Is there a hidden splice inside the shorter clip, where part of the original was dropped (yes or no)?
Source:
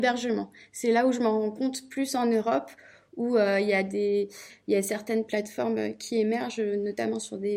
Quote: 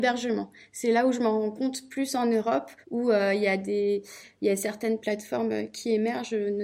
yes